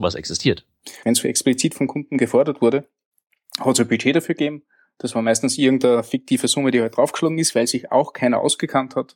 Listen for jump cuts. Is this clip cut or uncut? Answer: cut